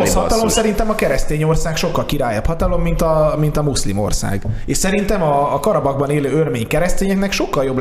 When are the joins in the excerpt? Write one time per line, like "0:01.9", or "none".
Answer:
none